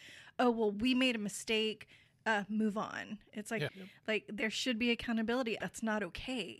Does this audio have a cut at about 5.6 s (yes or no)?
yes